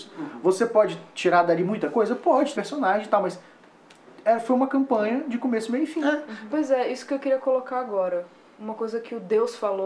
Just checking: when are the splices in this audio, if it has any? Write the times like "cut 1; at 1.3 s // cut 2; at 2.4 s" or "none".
cut 1; at 2.5 s // cut 2; at 6.5 s